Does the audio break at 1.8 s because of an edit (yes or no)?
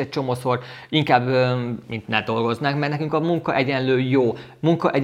yes